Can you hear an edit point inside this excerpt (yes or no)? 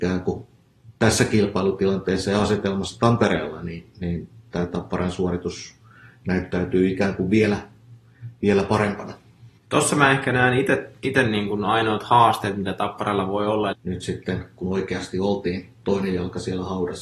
yes